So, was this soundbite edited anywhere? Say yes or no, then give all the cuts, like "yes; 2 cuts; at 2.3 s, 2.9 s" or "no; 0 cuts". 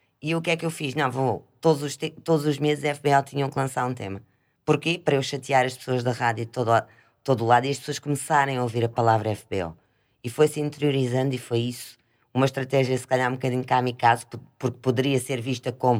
no; 0 cuts